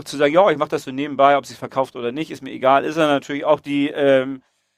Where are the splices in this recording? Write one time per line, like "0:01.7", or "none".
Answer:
none